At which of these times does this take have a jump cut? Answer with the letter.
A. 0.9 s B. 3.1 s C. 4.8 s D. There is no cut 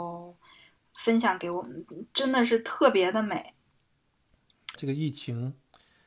C